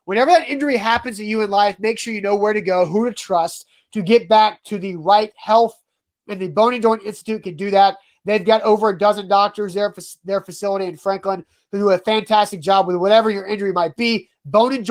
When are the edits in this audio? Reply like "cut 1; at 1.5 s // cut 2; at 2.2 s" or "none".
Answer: none

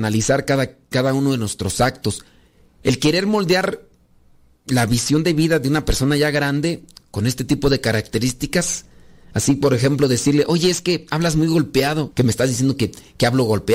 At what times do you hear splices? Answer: cut 1; at 12.1 s

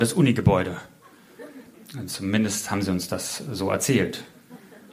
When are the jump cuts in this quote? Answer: none

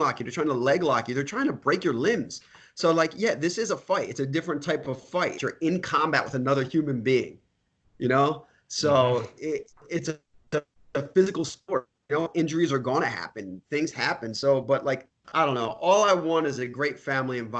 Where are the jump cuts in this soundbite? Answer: cut 1; at 5.4 s // cut 2; at 9.7 s

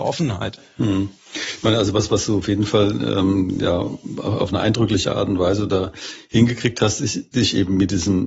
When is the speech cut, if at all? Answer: none

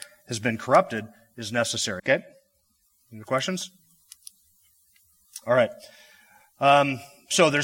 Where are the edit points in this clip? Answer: cut 1; at 2.0 s

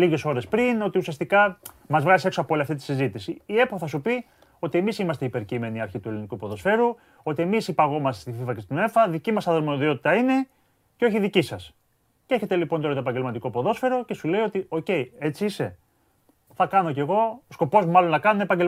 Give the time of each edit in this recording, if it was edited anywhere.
none

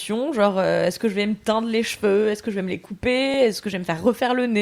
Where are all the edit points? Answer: none

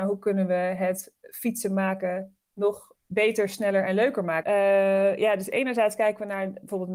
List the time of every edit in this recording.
cut 1; at 3.0 s // cut 2; at 4.4 s

